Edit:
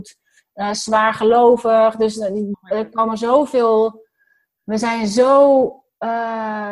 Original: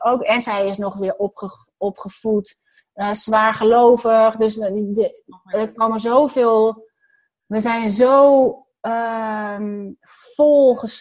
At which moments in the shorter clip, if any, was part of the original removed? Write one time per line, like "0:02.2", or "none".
0:02.5